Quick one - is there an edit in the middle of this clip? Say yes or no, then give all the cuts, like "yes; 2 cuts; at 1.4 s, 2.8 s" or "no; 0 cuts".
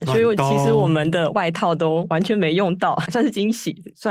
yes; 1 cut; at 3.1 s